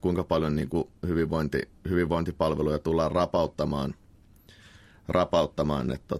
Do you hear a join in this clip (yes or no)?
no